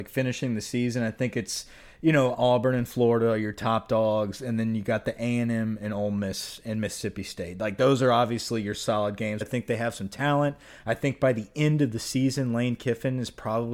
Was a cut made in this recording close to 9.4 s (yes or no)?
yes